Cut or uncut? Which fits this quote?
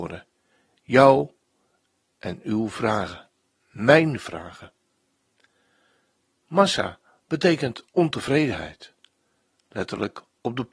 uncut